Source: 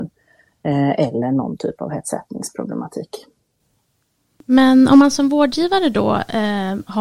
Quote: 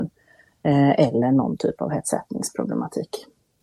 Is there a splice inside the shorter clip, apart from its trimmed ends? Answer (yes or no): no